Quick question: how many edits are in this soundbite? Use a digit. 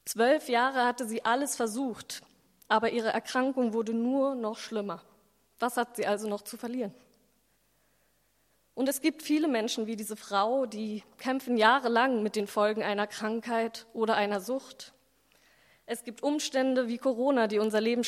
0